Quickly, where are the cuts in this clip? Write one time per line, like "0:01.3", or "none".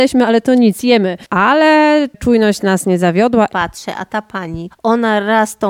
0:03.5
0:04.7

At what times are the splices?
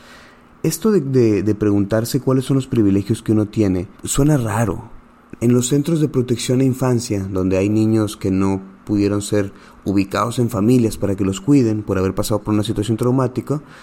0:03.9
0:05.3

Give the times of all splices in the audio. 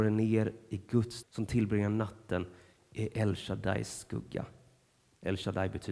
0:01.2

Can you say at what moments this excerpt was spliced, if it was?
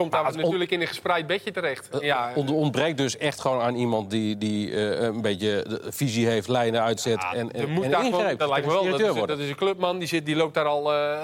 0:07.3
0:08.4

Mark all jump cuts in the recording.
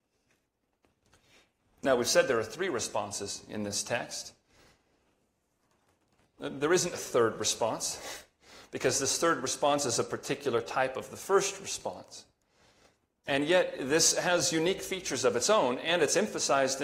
0:06.9

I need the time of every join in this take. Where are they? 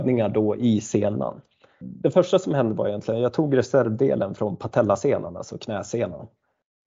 0:01.8

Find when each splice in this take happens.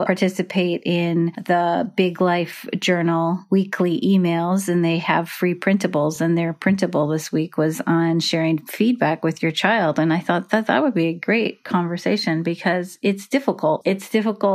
none

